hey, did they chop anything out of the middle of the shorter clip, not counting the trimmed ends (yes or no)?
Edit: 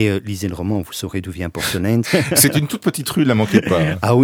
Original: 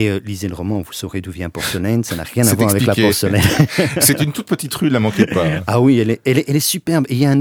yes